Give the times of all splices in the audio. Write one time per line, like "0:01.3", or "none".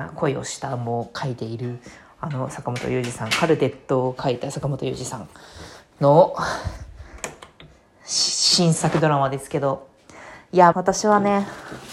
0:10.7